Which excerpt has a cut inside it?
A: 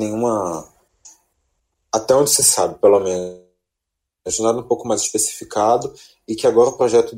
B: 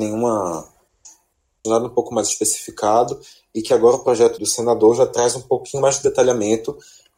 B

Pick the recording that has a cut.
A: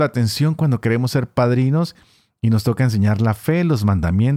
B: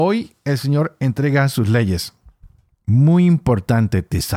B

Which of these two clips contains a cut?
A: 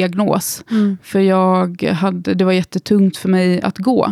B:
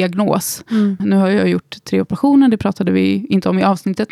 B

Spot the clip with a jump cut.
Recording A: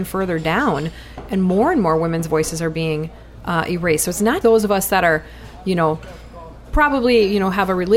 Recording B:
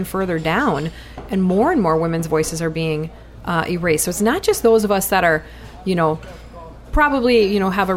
A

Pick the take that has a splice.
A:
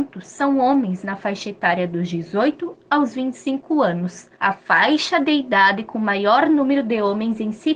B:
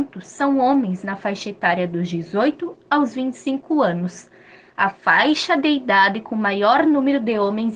A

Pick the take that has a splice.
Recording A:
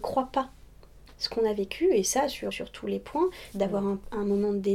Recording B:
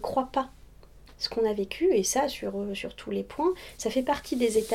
A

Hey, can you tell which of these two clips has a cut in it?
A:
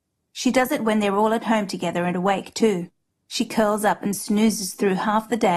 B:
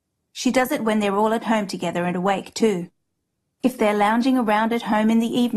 A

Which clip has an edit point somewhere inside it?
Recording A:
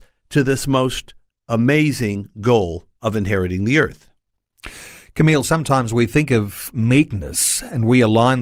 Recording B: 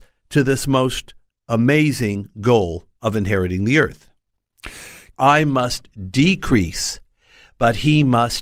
B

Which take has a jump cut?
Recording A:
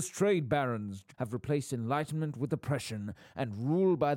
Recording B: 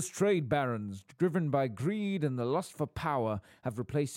A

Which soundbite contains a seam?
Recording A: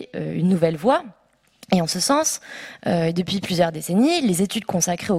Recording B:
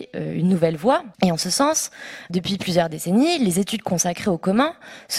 B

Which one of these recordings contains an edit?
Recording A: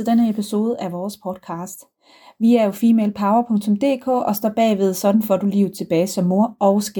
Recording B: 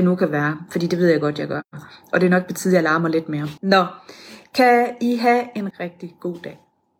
B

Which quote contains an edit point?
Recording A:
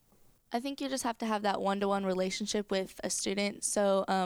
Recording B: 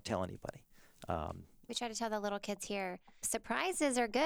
B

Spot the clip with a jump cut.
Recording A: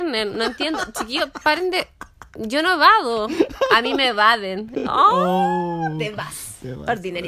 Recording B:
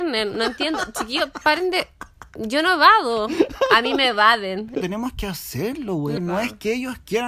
B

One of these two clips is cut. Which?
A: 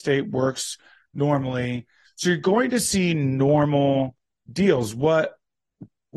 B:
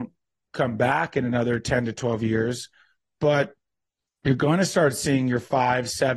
A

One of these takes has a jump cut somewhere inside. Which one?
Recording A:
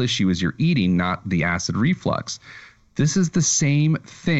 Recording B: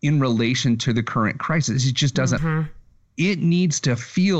B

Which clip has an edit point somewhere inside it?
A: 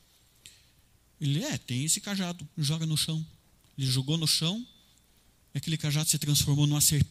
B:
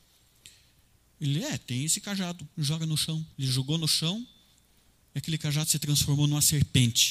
B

